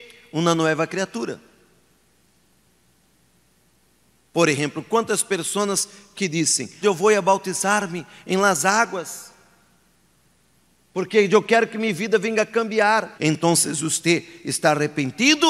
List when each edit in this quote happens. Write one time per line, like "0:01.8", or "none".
0:06.8
0:13.2